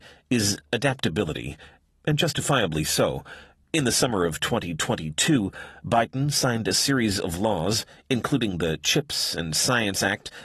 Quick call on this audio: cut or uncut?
cut